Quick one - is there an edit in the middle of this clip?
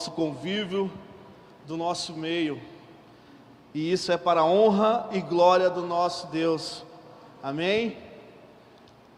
no; 0 cuts

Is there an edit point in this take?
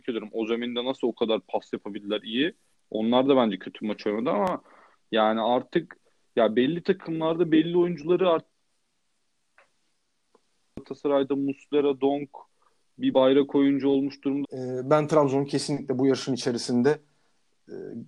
yes; 2 cuts; at 2.7 s, 14.4 s

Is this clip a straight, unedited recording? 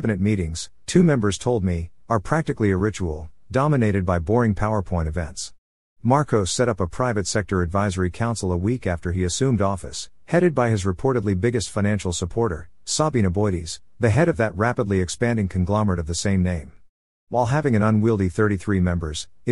yes; 0 cuts

